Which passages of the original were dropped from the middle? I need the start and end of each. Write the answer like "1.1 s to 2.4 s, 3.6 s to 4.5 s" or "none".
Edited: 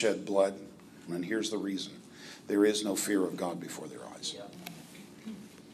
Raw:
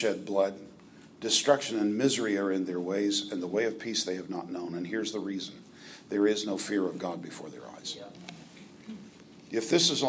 1.1 s to 4.7 s